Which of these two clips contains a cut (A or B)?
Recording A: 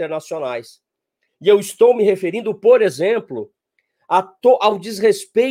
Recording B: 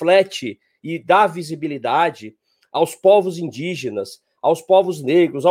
A